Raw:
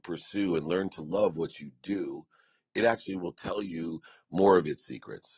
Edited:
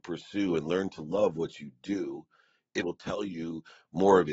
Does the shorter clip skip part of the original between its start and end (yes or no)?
yes